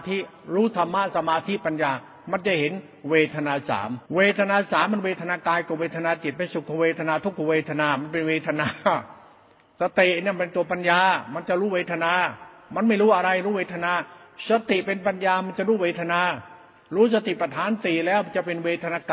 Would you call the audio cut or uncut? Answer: cut